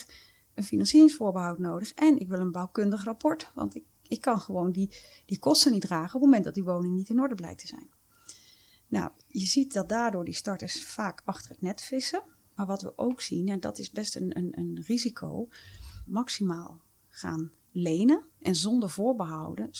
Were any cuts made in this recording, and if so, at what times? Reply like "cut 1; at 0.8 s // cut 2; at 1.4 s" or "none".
cut 1; at 12.5 s // cut 2; at 16.1 s // cut 3; at 18.3 s